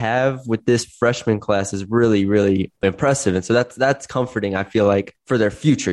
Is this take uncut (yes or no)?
yes